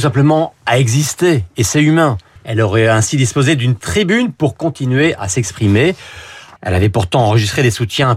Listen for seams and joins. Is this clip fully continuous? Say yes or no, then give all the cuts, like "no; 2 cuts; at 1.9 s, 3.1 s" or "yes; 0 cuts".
no; 2 cuts; at 2.4 s, 6.6 s